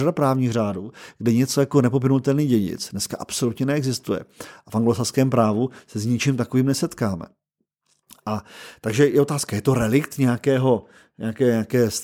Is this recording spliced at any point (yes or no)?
no